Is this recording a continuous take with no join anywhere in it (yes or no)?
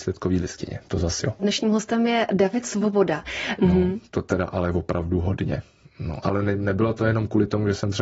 no